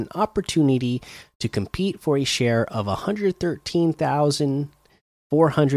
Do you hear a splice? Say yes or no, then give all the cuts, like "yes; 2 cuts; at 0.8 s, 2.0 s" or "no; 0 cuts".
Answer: no; 0 cuts